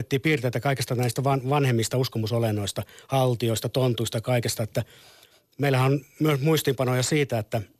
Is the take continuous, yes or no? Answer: yes